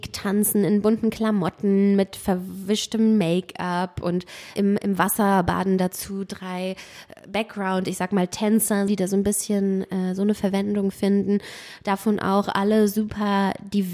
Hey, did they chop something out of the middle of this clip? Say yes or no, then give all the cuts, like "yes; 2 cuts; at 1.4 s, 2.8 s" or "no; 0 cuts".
yes; 1 cut; at 8.9 s